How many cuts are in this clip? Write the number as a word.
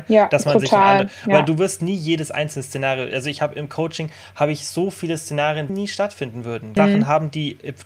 two